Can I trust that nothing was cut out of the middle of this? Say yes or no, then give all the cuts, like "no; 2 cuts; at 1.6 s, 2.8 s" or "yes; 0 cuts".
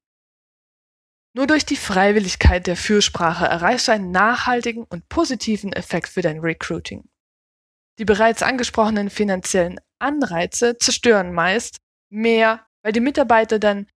no; 1 cut; at 12.7 s